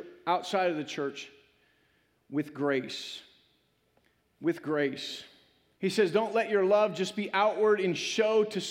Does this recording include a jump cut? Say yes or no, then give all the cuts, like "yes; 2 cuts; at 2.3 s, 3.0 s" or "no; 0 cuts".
yes; 1 cut; at 5.8 s